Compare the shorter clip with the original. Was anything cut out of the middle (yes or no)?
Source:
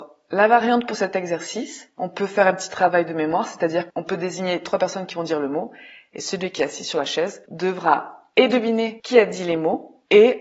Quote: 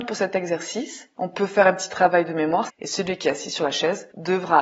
yes